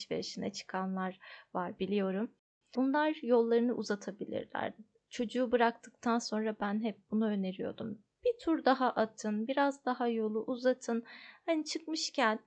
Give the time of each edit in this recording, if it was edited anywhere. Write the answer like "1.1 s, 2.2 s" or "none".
none